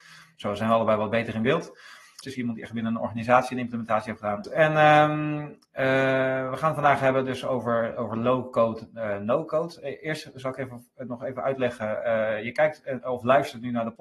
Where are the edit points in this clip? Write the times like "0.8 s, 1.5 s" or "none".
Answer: 2.2 s, 4.4 s